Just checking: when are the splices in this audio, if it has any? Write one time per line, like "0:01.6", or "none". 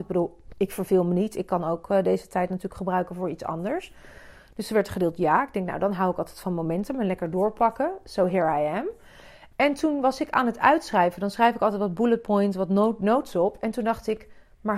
none